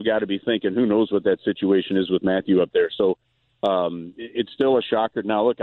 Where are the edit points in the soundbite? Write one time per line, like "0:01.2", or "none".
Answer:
none